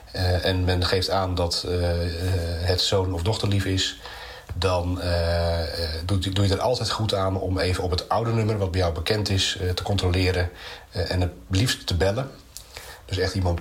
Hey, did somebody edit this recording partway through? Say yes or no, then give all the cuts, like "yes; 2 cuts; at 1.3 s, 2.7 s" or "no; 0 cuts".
no; 0 cuts